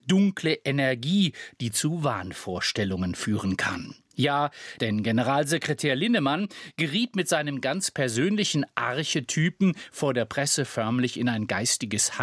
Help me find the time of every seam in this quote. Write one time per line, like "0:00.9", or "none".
0:04.8